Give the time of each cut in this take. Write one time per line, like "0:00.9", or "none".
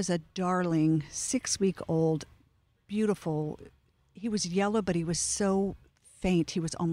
none